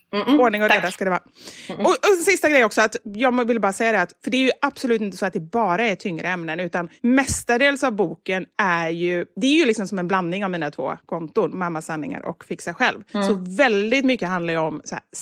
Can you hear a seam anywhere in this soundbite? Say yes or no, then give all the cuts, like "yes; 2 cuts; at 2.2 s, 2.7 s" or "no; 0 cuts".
no; 0 cuts